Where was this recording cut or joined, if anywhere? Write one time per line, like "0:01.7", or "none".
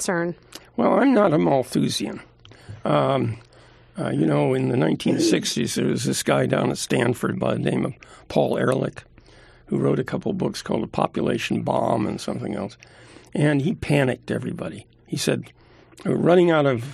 none